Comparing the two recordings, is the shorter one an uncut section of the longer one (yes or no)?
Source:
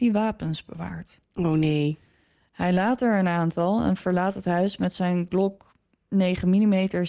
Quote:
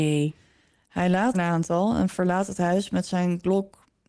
no